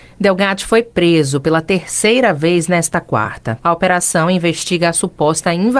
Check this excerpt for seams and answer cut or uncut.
cut